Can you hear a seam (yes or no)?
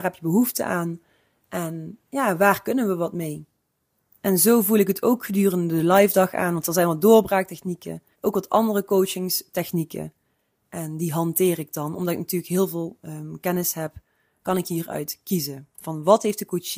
yes